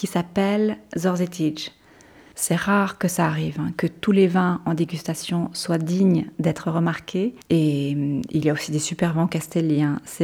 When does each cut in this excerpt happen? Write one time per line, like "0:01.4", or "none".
0:02.3
0:07.4

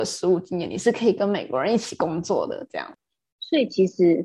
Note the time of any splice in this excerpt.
none

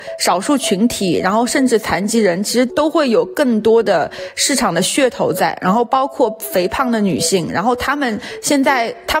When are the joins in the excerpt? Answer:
0:02.7

